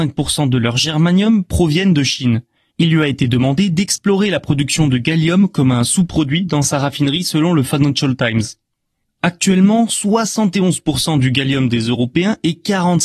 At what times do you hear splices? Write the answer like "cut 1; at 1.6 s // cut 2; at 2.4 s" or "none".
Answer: cut 1; at 2.7 s